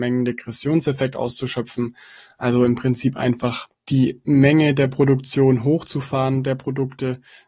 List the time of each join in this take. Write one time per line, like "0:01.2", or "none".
0:03.7

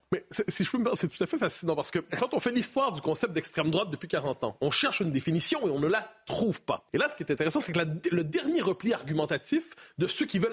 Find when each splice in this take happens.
0:06.9

